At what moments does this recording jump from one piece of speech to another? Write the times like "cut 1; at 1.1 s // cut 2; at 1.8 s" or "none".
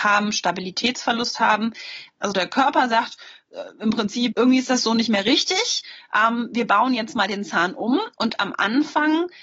cut 1; at 2.2 s // cut 2; at 4.3 s